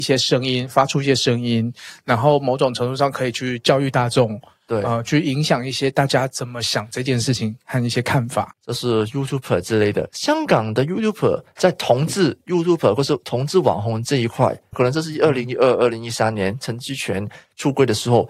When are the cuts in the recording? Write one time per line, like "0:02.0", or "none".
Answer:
0:08.5
0:14.7